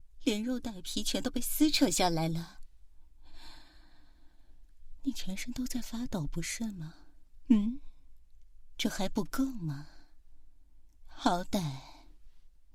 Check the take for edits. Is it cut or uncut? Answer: uncut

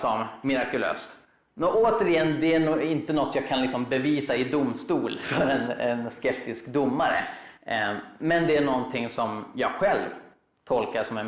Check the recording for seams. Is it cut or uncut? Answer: uncut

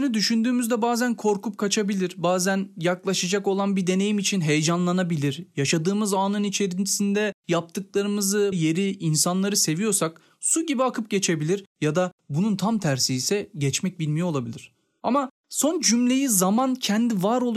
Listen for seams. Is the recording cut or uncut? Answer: cut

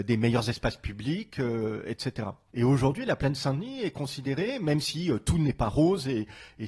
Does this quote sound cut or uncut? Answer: cut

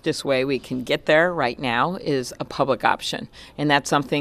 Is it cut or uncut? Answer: uncut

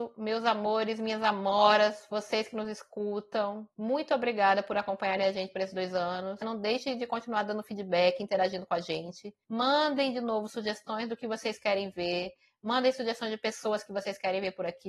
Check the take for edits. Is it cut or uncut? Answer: cut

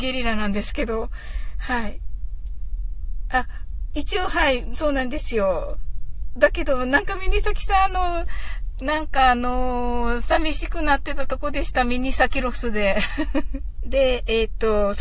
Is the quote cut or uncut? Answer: cut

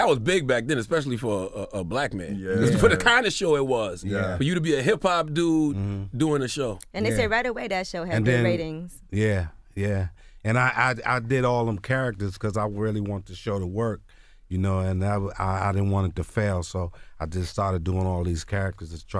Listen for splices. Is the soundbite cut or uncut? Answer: uncut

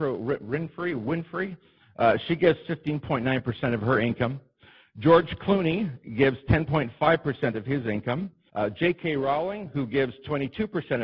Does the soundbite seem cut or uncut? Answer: cut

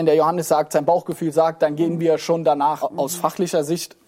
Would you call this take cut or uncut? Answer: cut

